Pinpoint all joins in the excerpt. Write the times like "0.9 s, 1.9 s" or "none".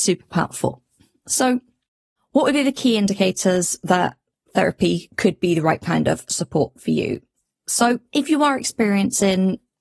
none